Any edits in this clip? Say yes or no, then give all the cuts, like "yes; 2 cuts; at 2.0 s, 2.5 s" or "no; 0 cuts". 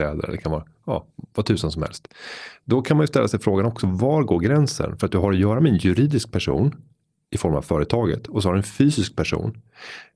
no; 0 cuts